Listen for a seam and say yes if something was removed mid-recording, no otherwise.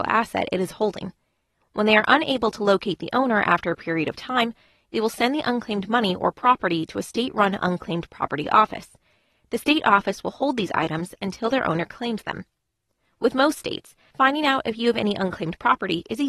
no